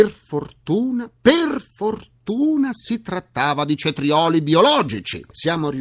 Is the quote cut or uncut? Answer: uncut